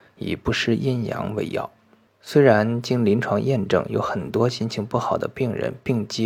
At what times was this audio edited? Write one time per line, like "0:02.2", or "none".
0:02.1